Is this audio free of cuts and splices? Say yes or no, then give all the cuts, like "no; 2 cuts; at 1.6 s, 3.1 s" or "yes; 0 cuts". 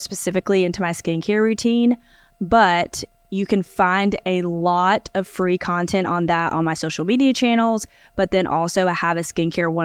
no; 1 cut; at 2.3 s